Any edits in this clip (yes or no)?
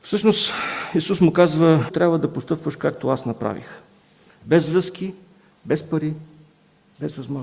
yes